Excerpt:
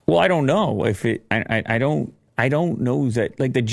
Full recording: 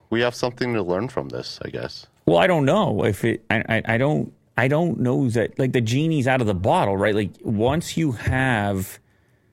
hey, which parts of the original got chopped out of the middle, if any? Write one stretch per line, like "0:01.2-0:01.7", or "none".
none